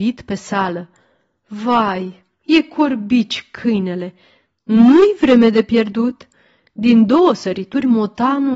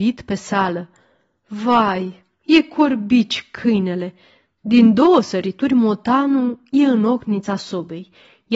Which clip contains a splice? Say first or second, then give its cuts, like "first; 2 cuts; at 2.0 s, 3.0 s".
second; 1 cut; at 4.6 s